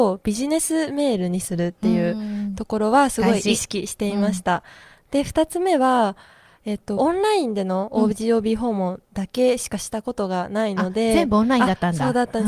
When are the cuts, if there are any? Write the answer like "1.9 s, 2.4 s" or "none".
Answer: 7.0 s

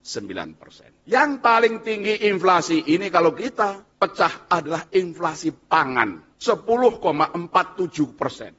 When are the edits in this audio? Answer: 1.0 s

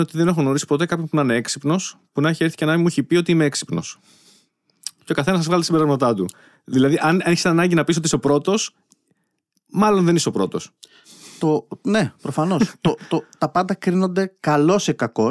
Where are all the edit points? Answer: none

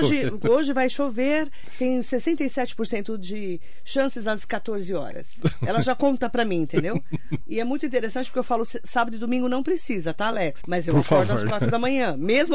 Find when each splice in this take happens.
7.4 s, 10.6 s

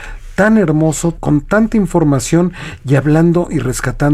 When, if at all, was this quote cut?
1.1 s

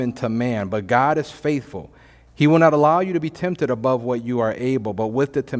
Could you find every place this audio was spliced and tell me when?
none

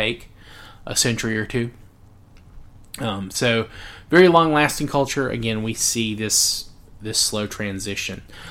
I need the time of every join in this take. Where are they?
3.3 s

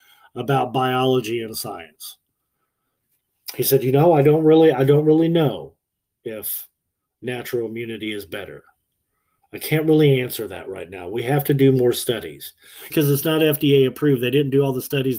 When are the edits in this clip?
12.9 s

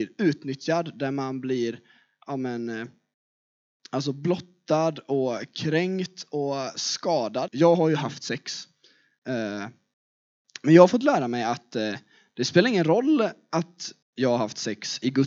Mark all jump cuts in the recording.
7.5 s, 14.0 s

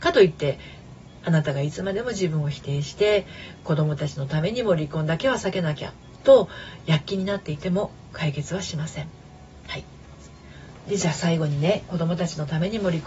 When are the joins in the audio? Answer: none

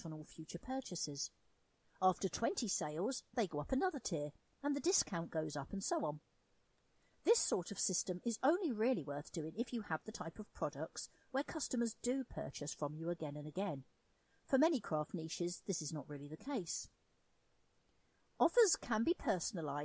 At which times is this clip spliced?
none

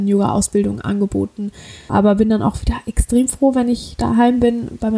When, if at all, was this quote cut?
1.9 s

